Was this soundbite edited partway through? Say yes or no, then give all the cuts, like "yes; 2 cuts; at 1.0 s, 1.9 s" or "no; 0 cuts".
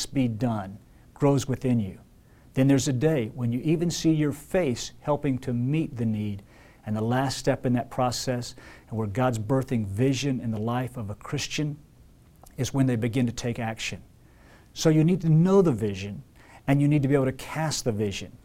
no; 0 cuts